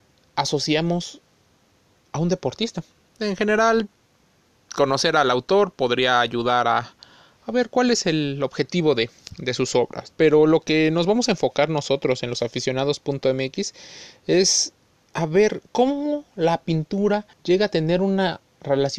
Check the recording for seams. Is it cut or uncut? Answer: cut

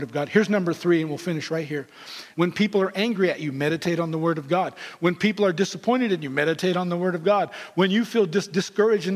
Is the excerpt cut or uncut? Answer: cut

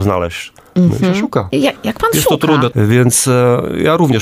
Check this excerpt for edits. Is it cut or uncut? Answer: cut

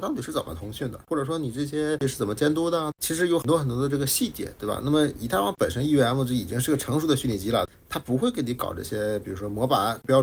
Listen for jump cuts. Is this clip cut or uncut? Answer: uncut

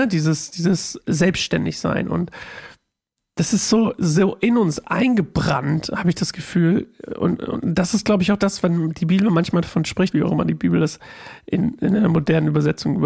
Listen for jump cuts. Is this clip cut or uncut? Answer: cut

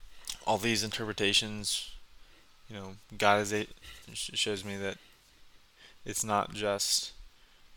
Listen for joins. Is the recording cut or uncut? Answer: uncut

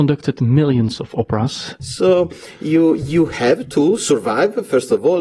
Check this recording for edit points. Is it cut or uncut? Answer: cut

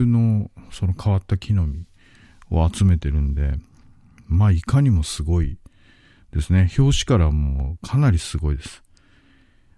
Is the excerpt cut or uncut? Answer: uncut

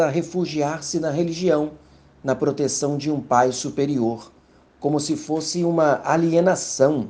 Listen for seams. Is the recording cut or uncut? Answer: uncut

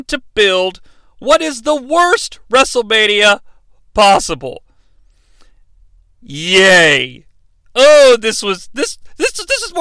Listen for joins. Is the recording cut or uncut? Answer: uncut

